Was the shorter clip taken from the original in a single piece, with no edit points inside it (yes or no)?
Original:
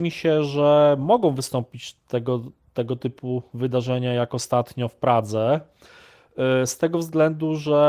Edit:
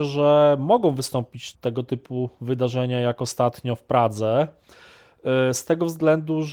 no